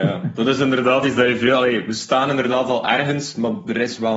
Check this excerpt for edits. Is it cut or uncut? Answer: uncut